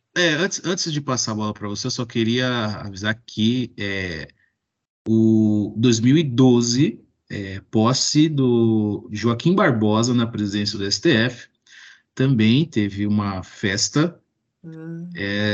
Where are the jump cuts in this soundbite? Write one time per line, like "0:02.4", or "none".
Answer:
none